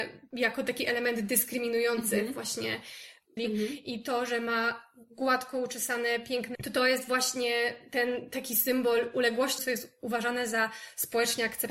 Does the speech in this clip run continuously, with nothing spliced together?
no; 3 cuts; at 3.4 s, 6.5 s, 9.6 s

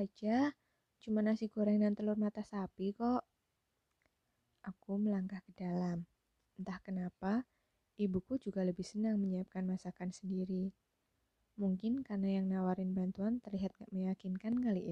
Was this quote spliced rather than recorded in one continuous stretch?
no; 0 cuts

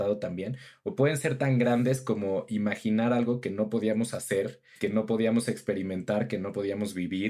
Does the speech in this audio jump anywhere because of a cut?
yes; 1 cut; at 4.8 s

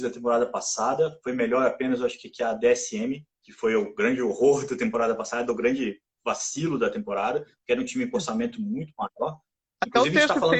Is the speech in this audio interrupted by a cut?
no; 0 cuts

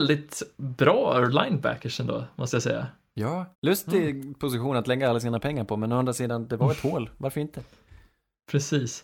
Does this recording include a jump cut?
yes; 1 cut; at 3.5 s

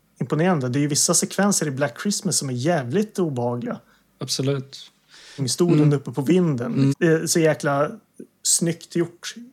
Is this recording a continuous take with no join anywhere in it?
no; 2 cuts; at 5.4 s, 6.9 s

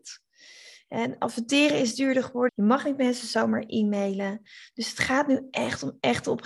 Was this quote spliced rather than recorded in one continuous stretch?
yes; 1 cut; at 2.5 s

